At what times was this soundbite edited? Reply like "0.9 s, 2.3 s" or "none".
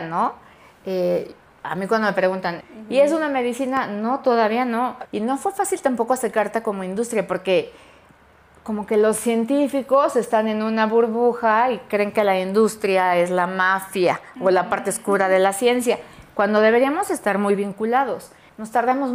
5.0 s